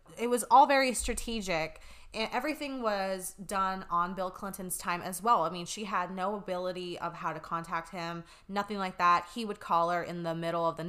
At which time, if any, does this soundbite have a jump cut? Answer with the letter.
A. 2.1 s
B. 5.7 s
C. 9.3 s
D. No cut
D